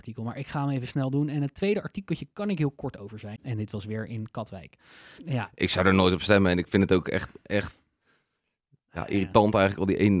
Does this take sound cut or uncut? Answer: cut